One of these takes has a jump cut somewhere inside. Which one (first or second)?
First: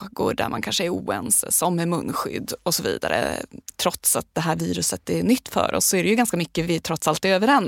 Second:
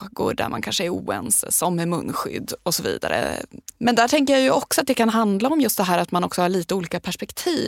second